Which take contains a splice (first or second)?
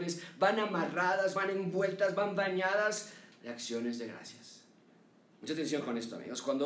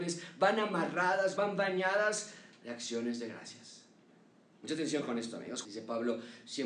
second